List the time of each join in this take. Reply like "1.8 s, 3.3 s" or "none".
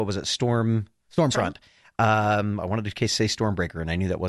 1.3 s